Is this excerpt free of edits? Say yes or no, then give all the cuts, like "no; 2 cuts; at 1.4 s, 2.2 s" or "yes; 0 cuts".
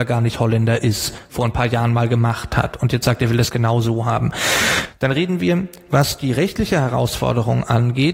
yes; 0 cuts